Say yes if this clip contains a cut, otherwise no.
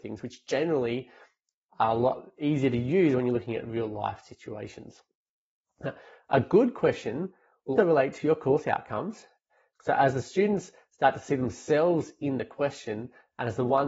yes